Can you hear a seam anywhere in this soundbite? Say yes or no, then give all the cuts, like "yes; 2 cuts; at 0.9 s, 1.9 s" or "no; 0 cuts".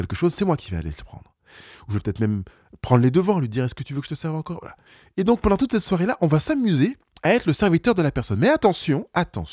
no; 0 cuts